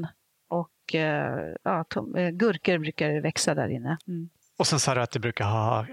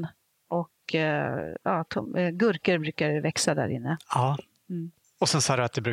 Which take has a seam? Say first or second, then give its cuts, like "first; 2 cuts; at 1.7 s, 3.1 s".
first; 1 cut; at 4.0 s